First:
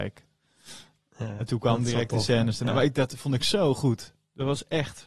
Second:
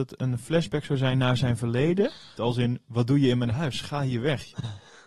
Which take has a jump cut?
second; 1 cut; at 2.4 s

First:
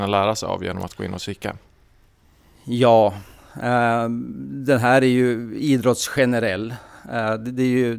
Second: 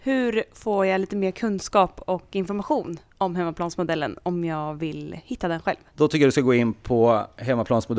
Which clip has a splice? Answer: second; 1 cut; at 5.9 s

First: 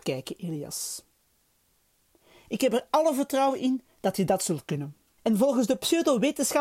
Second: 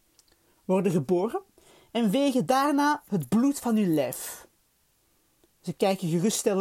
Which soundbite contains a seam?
first; 1 cut; at 5.2 s

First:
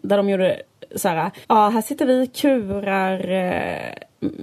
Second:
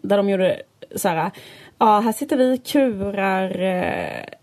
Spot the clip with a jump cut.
first; 1 cut; at 1.4 s

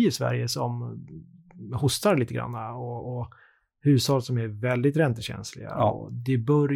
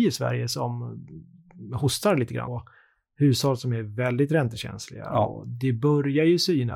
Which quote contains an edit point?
second; 1 cut; at 2.5 s

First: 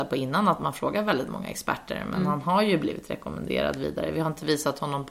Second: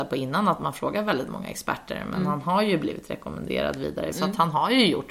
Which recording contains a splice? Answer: second; 1 cut; at 4.1 s

